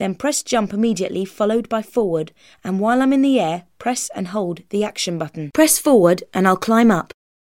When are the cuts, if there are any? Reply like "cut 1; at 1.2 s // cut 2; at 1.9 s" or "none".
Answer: none